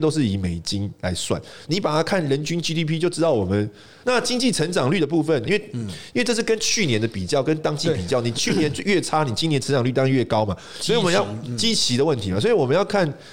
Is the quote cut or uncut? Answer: cut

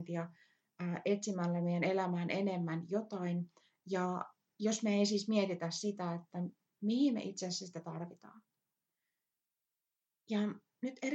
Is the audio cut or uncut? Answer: uncut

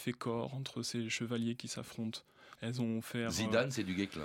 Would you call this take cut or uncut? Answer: cut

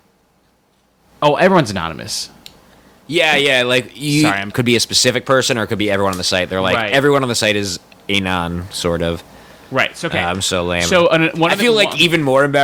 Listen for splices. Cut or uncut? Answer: cut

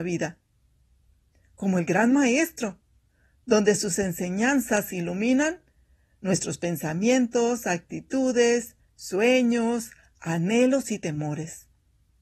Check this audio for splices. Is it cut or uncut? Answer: uncut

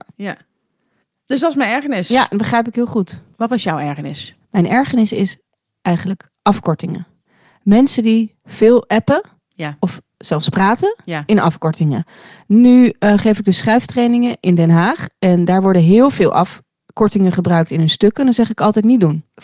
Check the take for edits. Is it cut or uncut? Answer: uncut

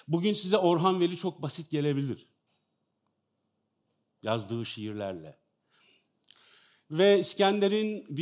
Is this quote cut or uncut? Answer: cut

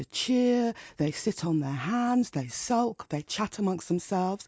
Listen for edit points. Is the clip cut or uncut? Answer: uncut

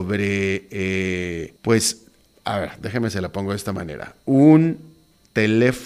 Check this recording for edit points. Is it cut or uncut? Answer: cut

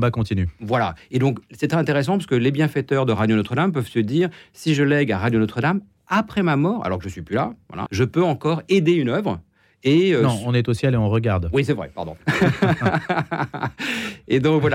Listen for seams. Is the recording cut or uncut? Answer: cut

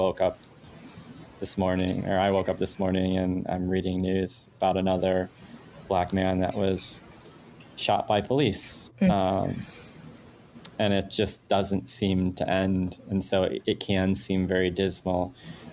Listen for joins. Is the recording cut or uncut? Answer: uncut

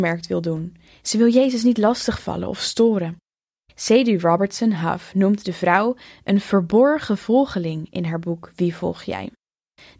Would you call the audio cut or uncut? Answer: uncut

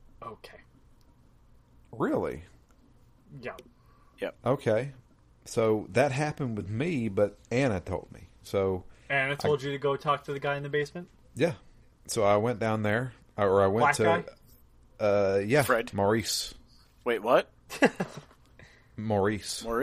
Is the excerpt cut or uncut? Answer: cut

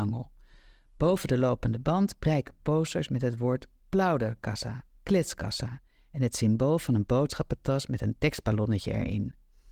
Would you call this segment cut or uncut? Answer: uncut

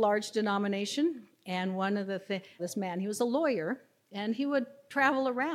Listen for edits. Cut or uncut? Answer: cut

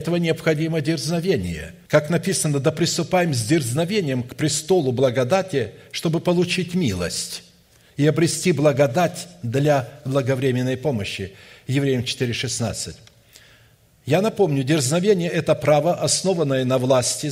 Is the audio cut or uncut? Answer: cut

